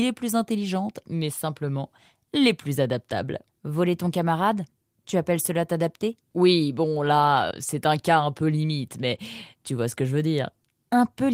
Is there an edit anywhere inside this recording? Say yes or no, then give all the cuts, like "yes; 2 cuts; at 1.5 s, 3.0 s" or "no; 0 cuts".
yes; 1 cut; at 7.5 s